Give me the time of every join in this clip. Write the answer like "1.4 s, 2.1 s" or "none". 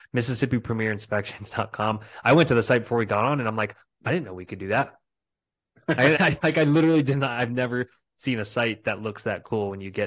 6.2 s